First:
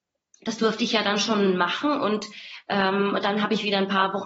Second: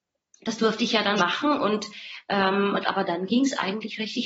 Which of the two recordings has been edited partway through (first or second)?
second